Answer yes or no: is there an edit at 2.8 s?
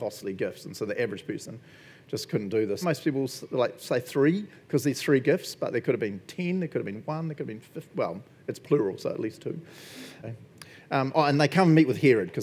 yes